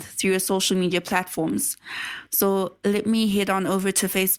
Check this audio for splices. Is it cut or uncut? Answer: cut